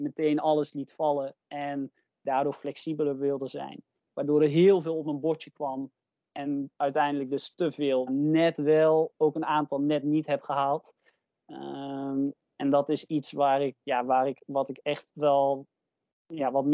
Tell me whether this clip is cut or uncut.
cut